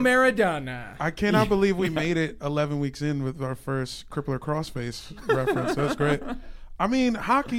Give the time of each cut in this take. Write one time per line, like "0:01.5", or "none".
none